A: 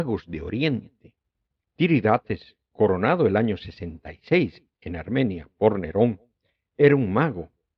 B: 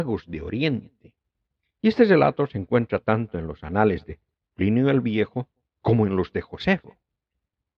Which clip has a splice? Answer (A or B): A